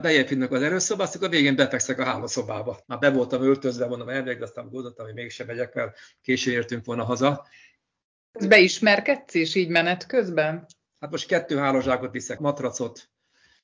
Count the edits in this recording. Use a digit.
3